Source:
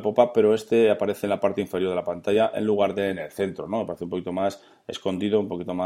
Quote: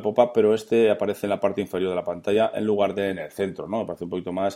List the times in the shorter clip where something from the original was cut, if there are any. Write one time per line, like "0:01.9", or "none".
none